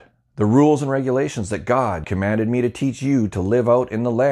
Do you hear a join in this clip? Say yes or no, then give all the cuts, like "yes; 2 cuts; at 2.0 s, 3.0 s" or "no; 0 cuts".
yes; 1 cut; at 2.0 s